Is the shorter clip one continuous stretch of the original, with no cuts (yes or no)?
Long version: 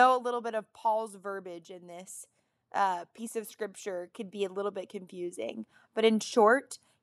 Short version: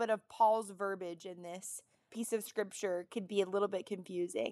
no